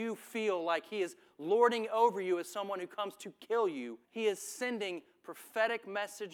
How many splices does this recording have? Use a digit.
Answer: 1